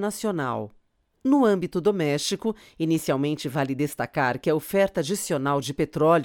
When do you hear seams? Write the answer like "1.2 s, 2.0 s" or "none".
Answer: 1.1 s